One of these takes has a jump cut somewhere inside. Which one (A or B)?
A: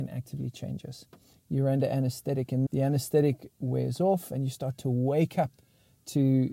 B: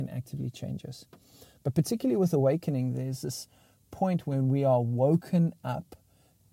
A